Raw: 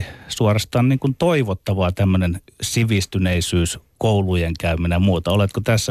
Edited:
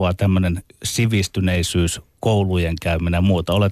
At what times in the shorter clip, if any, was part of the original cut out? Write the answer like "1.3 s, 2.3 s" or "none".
none